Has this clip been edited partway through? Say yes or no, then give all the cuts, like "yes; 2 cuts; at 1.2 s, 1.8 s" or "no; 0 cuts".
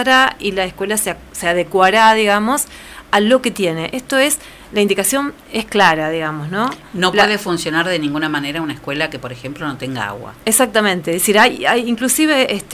no; 0 cuts